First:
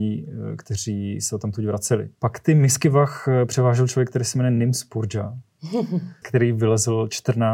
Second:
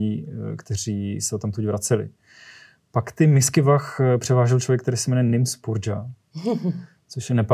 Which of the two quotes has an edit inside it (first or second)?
first